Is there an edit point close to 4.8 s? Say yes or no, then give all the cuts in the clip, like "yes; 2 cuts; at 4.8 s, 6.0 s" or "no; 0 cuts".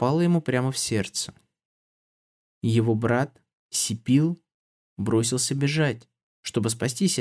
yes; 1 cut; at 4.8 s